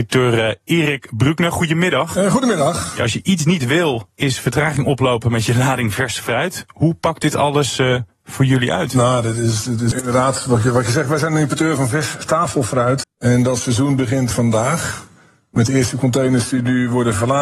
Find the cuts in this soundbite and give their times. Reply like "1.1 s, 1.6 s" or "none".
9.9 s, 13.0 s, 14.3 s